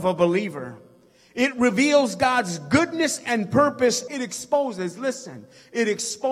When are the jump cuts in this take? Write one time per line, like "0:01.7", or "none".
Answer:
0:04.1

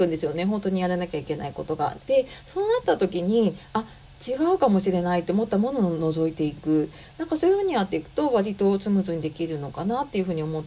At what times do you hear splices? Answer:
0:02.0

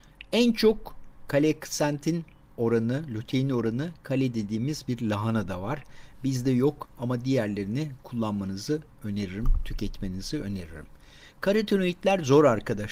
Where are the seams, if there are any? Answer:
none

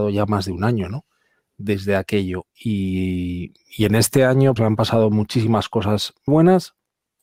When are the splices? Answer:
0:04.6
0:06.3

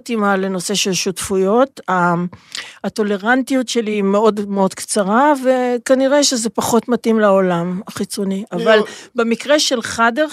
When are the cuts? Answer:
none

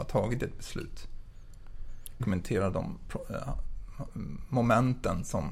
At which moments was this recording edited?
0:02.2

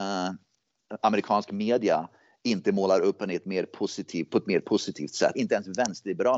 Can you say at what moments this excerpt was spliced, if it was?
0:05.3

